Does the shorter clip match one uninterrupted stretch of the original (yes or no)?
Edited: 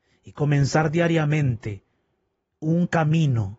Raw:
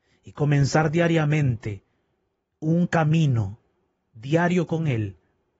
yes